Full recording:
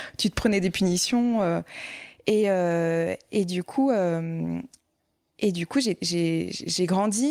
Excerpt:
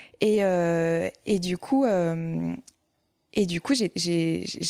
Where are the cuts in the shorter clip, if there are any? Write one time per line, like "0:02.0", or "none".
none